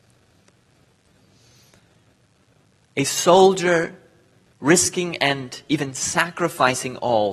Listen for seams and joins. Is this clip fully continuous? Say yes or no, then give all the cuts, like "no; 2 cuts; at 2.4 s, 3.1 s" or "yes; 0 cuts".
yes; 0 cuts